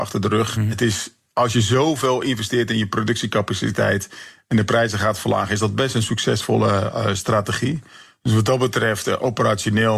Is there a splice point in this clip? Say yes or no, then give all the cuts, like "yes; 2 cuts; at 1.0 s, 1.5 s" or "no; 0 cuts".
no; 0 cuts